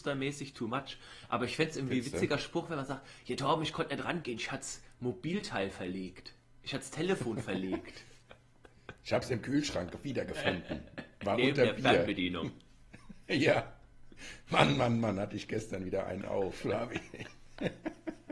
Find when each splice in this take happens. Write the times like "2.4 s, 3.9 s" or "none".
none